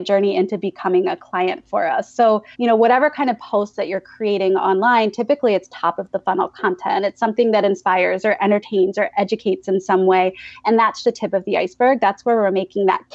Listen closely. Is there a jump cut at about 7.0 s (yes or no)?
no